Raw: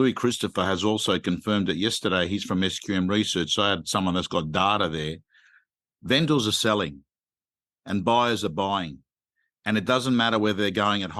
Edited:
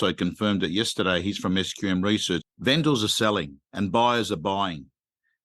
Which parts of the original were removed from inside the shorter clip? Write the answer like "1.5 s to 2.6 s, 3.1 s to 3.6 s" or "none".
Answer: 3.5 s to 5.8 s, 7.1 s to 7.8 s